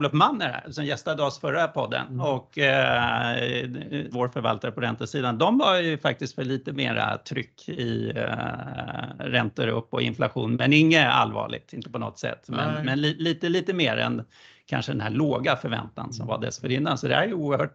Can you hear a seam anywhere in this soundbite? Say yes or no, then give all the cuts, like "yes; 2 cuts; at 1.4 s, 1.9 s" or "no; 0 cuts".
yes; 1 cut; at 4.1 s